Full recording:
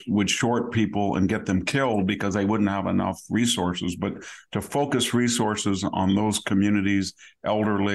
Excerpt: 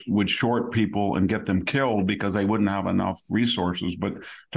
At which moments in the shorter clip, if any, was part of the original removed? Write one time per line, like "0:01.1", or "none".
none